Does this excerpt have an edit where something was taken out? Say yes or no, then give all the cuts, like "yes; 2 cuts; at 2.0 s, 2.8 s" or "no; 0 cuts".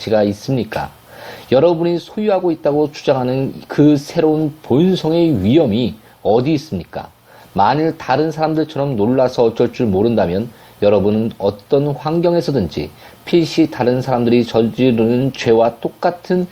no; 0 cuts